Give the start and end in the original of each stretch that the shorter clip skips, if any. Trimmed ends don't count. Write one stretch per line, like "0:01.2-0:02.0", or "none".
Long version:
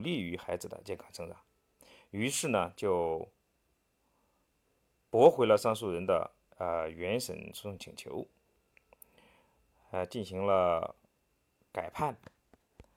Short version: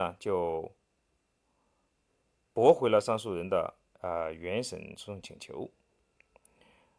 none